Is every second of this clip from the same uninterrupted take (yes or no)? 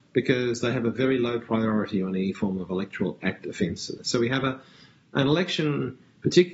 no